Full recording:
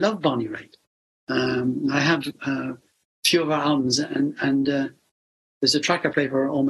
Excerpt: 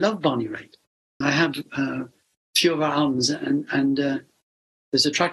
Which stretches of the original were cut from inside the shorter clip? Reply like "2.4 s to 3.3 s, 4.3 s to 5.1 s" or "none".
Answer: 1.2 s to 1.9 s

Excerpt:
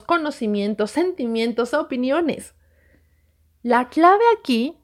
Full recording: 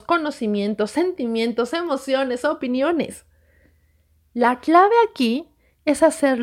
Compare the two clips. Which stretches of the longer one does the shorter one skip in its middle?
1.7 s to 2.4 s

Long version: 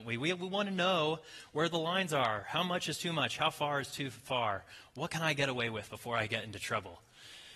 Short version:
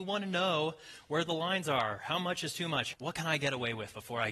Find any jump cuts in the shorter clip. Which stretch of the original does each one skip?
3.4 s to 4.9 s

